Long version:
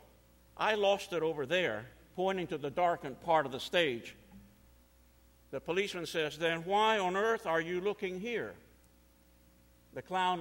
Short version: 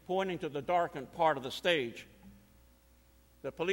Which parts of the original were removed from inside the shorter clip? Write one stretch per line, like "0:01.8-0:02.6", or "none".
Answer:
none